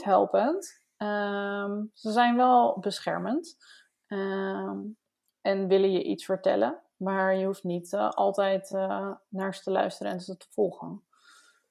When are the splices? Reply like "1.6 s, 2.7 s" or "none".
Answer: none